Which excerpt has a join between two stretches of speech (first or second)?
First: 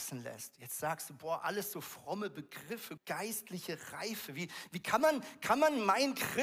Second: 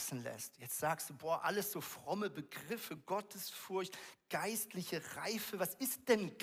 first